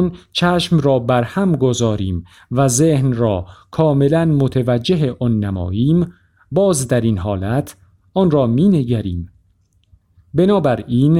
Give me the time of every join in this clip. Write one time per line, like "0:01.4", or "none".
none